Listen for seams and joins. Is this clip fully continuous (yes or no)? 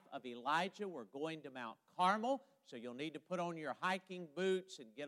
yes